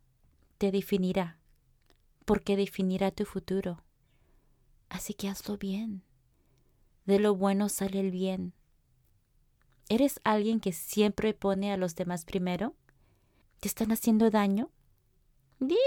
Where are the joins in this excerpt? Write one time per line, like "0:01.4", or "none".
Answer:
0:13.4

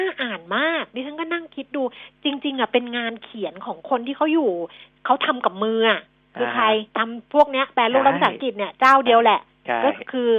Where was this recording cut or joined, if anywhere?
0:06.9

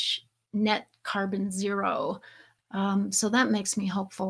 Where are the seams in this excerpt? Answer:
0:02.6

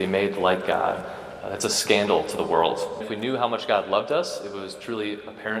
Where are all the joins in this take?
0:03.0

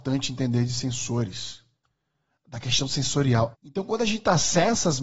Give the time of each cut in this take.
0:03.5

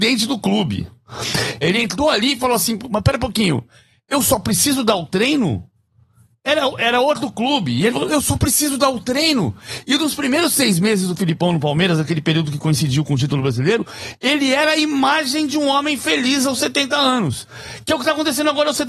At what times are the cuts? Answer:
0:01.6

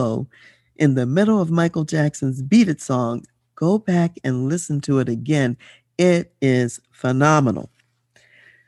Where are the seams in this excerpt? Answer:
none

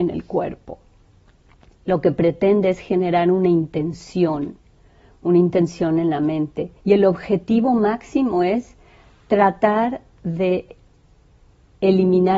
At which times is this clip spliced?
0:06.8

